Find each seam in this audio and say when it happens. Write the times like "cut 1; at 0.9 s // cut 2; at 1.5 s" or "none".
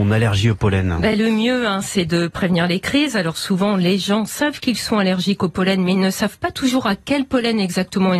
none